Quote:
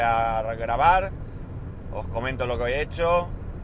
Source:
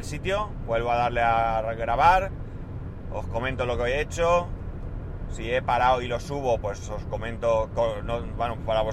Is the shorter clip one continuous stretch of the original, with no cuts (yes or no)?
yes